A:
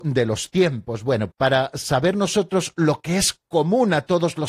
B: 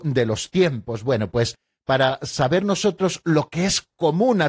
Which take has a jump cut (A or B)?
A